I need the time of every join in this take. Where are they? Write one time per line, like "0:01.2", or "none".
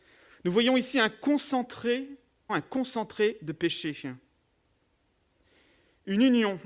0:02.5